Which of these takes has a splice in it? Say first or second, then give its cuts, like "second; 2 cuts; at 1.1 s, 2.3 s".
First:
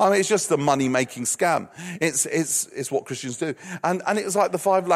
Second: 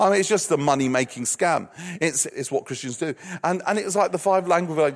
second; 1 cut; at 2.3 s